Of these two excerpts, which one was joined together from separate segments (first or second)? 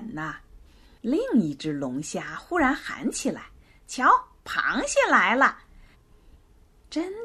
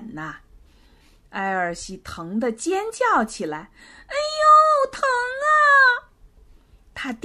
first